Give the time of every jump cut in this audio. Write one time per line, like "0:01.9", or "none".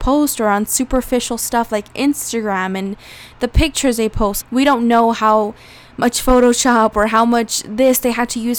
0:04.4